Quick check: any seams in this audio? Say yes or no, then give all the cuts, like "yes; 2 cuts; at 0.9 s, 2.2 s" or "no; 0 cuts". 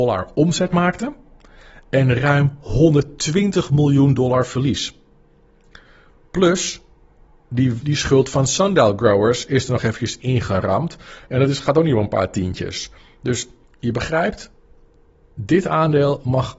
yes; 1 cut; at 7.8 s